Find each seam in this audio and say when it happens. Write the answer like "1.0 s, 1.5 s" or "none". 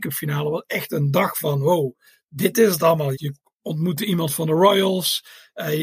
3.1 s